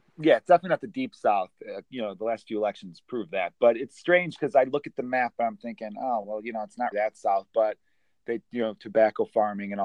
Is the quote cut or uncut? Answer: cut